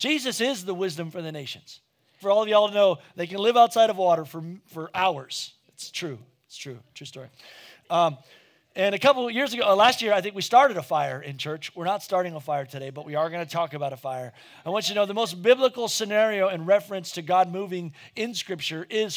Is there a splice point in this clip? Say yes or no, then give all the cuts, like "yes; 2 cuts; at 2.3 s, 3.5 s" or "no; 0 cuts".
yes; 1 cut; at 2.2 s